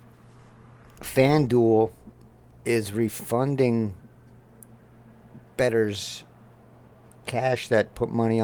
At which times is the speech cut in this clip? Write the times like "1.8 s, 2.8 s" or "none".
1.0 s